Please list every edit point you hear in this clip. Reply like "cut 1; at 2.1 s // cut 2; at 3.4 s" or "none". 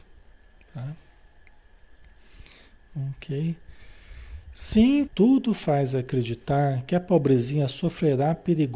cut 1; at 5.1 s